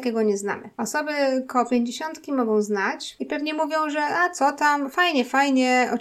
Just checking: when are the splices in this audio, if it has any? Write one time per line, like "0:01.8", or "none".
none